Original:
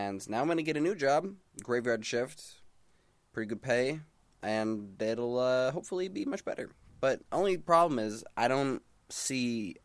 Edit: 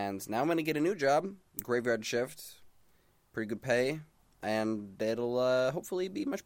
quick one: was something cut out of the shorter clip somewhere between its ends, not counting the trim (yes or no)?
no